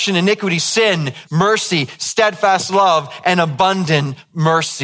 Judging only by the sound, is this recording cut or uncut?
cut